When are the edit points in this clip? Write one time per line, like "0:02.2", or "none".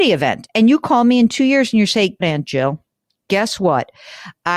0:02.2